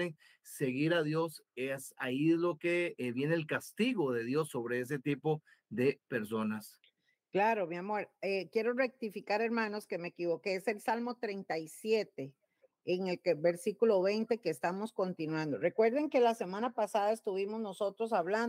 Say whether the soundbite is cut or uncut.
uncut